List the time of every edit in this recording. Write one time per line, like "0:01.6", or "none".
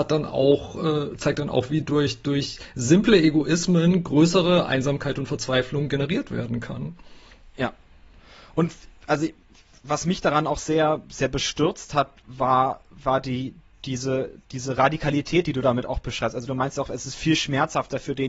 0:07.5